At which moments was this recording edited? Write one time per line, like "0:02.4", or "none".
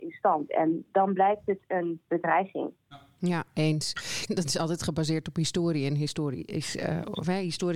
0:04.3